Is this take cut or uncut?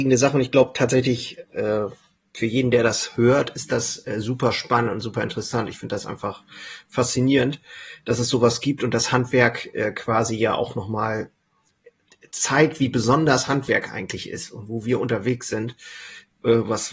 uncut